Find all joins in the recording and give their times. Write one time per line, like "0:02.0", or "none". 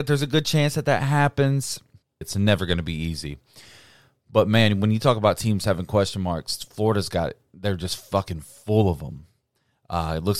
0:02.2